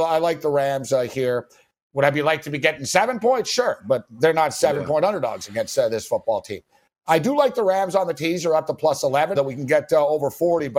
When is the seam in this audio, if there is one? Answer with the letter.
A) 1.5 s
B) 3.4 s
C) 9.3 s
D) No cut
C